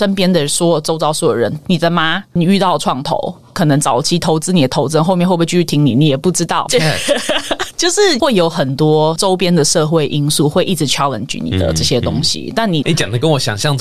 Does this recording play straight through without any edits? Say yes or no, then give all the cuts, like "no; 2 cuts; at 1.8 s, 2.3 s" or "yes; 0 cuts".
no; 2 cuts; at 6.7 s, 12.8 s